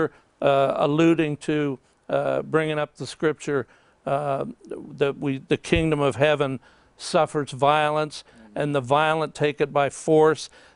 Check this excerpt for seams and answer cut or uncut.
uncut